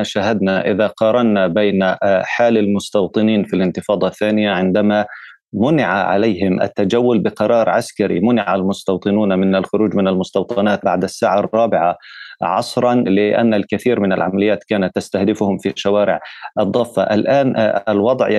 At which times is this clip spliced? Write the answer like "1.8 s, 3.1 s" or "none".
none